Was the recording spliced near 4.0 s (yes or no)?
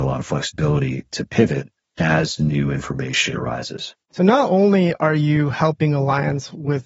yes